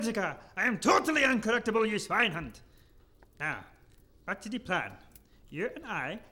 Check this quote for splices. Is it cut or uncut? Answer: uncut